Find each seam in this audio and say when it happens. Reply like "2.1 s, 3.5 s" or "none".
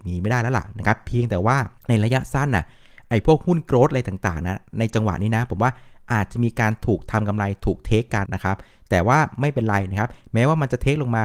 1.8 s, 8.3 s